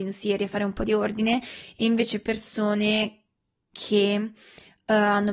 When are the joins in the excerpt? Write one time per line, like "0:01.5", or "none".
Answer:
none